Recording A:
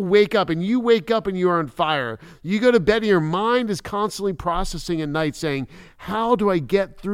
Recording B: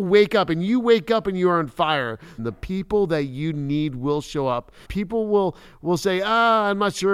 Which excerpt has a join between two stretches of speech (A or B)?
B